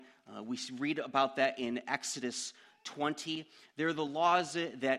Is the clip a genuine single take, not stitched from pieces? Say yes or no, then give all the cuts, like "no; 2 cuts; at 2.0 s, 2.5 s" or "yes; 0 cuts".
yes; 0 cuts